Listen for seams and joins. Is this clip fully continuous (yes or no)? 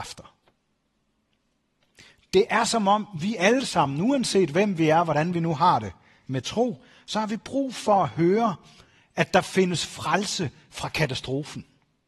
yes